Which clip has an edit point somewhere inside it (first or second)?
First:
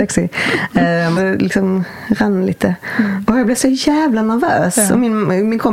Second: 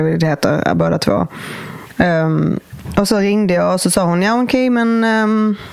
first